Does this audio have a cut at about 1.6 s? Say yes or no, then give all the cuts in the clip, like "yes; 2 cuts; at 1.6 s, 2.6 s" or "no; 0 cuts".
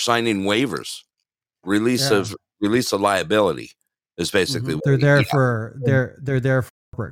no; 1 cut; at 4.8 s